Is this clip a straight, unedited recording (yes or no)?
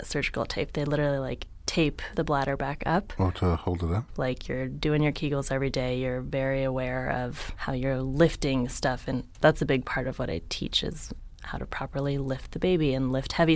no